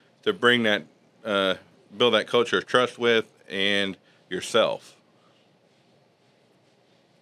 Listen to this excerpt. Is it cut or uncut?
uncut